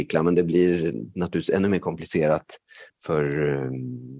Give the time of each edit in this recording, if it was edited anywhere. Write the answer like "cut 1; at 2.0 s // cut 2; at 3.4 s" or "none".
cut 1; at 2.9 s